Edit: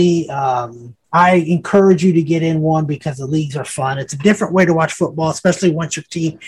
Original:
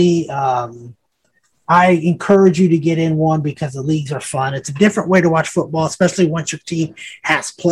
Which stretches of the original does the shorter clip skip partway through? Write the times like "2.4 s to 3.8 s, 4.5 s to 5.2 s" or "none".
1.0 s to 1.6 s